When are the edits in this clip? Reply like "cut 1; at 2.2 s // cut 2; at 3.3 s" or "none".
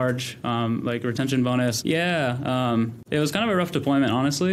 cut 1; at 1.8 s